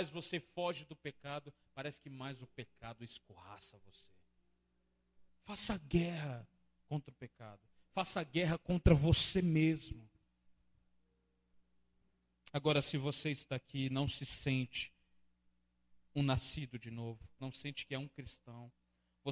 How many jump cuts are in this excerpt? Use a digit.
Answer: 2